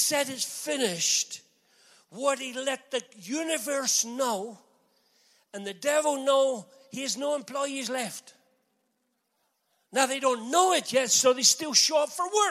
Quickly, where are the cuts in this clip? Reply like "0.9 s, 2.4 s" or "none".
none

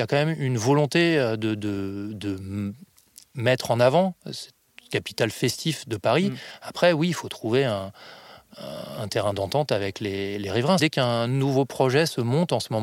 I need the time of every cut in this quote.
10.8 s

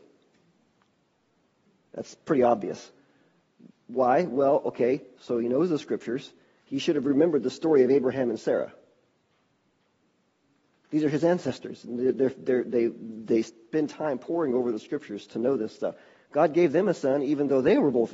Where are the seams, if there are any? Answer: 5.2 s

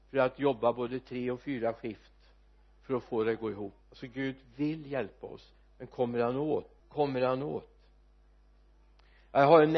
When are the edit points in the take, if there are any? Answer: 3.8 s, 6.8 s

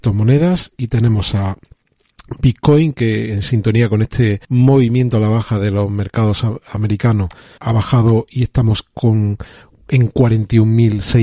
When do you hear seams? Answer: 4.4 s, 7.6 s

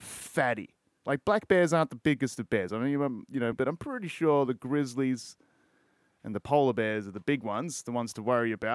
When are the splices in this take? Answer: 3.5 s

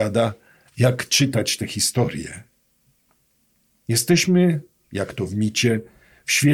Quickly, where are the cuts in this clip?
none

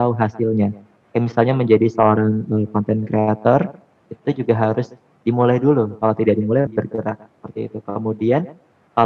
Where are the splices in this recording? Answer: 6.7 s

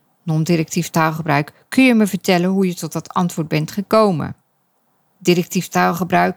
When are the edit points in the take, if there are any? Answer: none

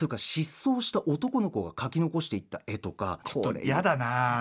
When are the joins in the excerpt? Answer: 3.2 s

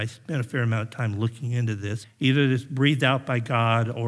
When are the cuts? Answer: 2.0 s

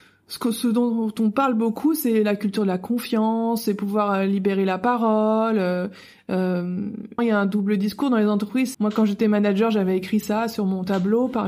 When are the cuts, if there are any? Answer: 7.2 s, 8.7 s

